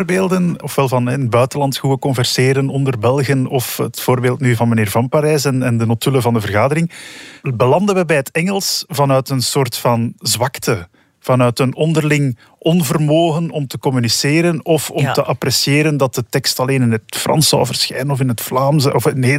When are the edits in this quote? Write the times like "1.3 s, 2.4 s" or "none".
none